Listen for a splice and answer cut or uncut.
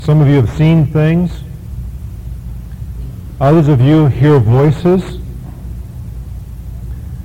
uncut